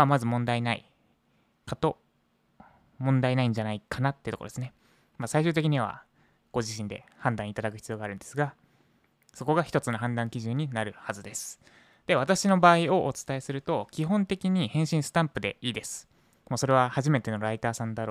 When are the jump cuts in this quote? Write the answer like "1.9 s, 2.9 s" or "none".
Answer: none